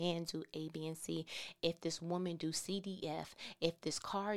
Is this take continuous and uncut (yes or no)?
yes